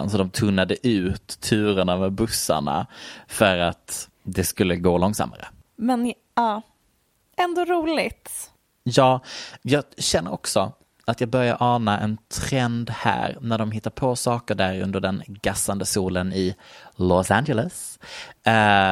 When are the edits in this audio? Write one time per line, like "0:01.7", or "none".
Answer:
0:04.1